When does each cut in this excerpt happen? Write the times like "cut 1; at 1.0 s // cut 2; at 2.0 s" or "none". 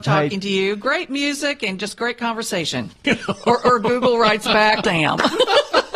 cut 1; at 3.0 s // cut 2; at 4.8 s

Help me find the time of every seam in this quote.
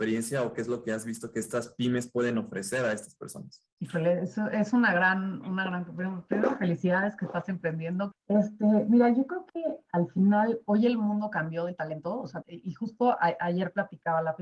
cut 1; at 3.7 s // cut 2; at 8.1 s // cut 3; at 12.4 s

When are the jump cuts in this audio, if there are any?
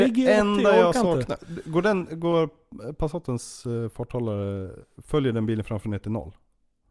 none

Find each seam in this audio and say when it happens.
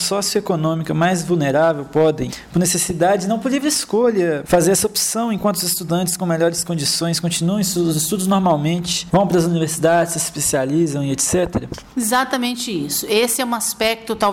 none

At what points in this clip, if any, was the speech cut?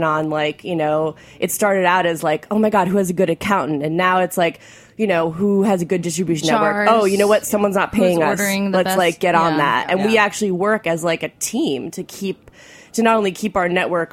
none

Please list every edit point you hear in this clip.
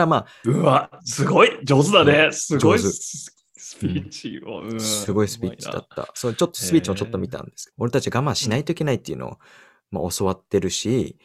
cut 1; at 7.7 s

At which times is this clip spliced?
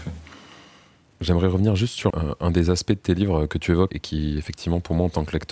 cut 1; at 2.1 s // cut 2; at 3.9 s

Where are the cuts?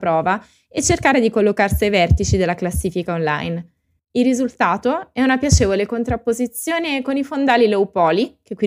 cut 1; at 4.0 s

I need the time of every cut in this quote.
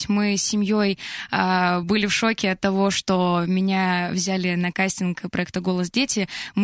none

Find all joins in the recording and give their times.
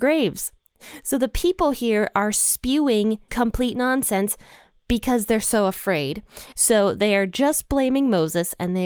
cut 1; at 3.3 s // cut 2; at 6.5 s

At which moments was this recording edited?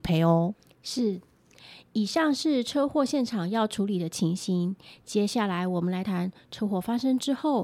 cut 1; at 6.0 s

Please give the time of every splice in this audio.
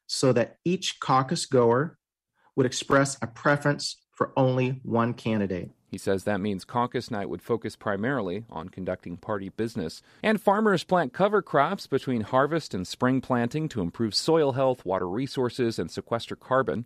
cut 1; at 10.2 s

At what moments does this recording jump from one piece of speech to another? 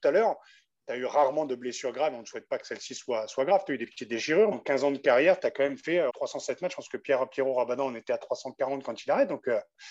cut 1; at 4.5 s // cut 2; at 6.1 s

